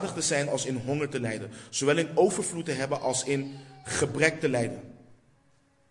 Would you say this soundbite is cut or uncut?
uncut